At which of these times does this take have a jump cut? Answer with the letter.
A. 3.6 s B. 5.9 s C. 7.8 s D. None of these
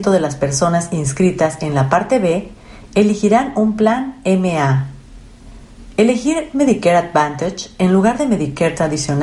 D